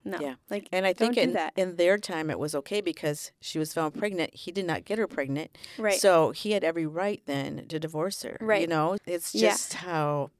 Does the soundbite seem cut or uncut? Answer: cut